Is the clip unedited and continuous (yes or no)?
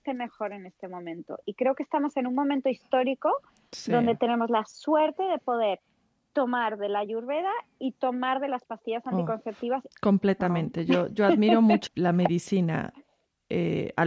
no